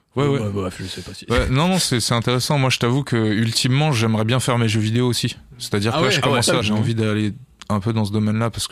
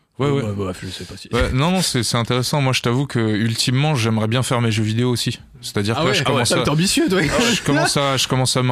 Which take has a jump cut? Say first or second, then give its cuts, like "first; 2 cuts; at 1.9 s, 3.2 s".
first; 1 cut; at 6.6 s